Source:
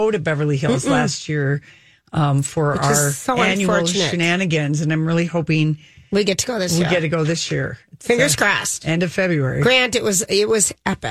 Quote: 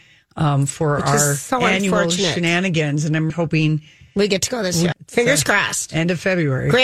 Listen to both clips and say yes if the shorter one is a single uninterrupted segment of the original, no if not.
no